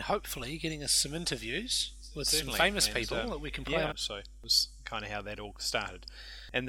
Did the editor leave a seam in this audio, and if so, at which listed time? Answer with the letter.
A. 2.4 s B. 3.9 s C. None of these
B